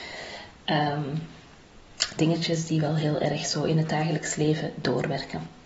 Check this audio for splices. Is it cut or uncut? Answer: cut